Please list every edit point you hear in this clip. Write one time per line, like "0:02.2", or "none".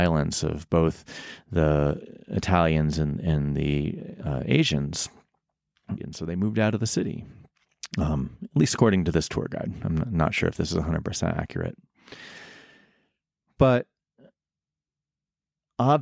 0:06.0
0:07.9